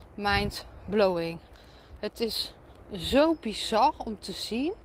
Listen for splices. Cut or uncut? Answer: uncut